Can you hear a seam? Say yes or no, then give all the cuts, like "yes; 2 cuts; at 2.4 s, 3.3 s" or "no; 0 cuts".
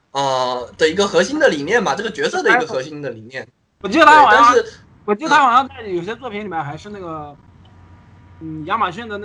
no; 0 cuts